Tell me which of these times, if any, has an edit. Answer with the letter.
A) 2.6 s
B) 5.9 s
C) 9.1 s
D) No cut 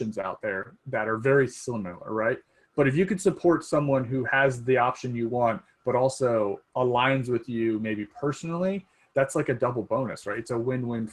D